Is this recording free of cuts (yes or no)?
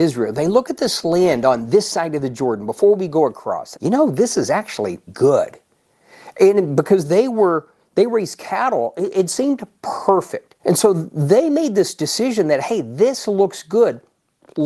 no